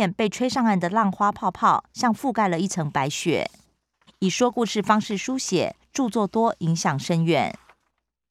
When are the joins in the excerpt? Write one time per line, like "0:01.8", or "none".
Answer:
0:04.1